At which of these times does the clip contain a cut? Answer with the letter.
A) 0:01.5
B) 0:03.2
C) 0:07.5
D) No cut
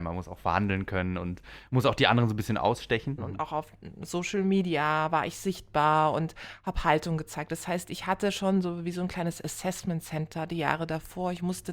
B